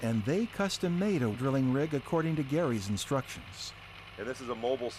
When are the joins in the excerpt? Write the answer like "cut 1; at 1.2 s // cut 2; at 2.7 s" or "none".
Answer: cut 1; at 1.3 s